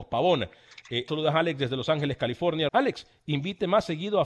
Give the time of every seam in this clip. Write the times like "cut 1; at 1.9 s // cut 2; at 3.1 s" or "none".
cut 1; at 1.1 s // cut 2; at 2.7 s